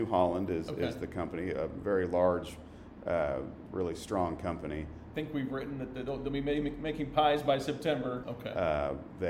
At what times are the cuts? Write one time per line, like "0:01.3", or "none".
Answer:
0:05.1
0:08.2